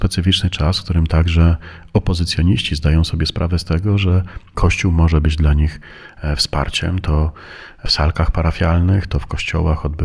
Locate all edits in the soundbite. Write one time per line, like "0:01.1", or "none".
none